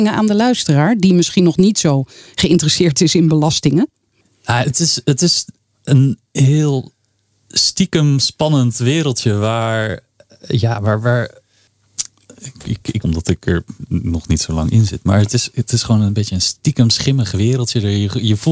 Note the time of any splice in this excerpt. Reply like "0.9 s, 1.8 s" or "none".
13.0 s